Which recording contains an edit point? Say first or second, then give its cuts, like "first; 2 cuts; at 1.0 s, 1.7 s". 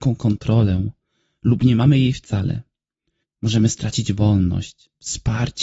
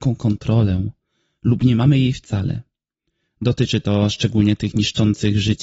first; 1 cut; at 3.2 s